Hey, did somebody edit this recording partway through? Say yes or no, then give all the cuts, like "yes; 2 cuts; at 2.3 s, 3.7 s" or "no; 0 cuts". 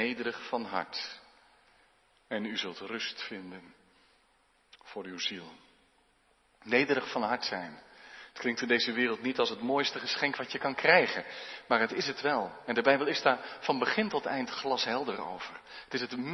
no; 0 cuts